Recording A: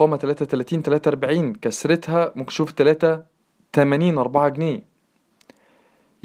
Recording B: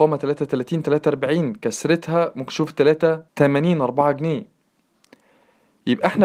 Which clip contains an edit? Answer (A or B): B